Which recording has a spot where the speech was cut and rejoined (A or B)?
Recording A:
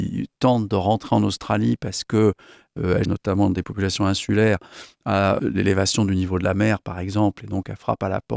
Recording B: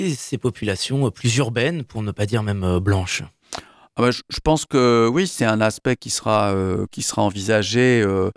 A